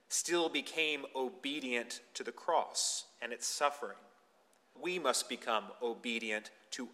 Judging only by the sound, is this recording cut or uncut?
cut